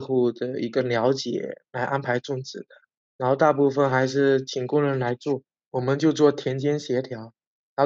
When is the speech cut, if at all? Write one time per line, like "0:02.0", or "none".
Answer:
none